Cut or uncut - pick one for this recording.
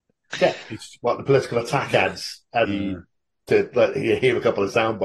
cut